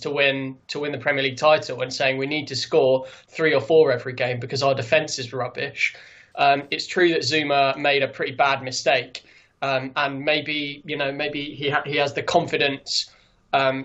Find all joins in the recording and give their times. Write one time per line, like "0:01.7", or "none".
0:06.3